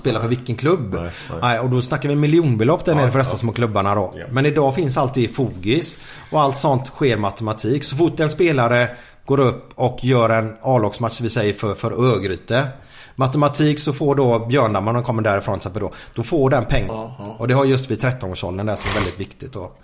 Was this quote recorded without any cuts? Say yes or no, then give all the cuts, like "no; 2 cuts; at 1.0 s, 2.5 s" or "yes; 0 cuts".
no; 1 cut; at 16.9 s